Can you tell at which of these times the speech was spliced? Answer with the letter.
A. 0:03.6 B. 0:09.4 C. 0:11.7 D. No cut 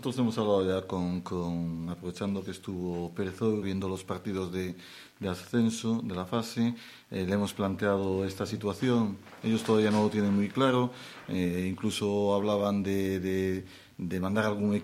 A